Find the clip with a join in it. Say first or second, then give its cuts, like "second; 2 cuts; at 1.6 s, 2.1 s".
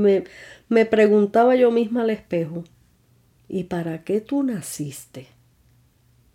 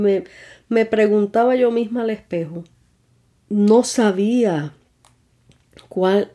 second; 1 cut; at 3.4 s